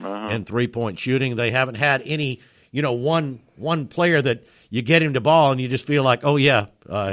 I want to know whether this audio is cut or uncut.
uncut